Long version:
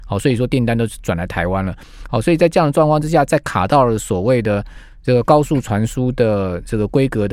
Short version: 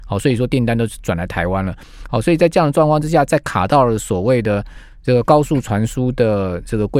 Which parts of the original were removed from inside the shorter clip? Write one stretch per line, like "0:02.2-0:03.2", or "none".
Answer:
none